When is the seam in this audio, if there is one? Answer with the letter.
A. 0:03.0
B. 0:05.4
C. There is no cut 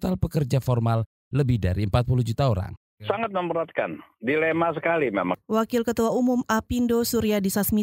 A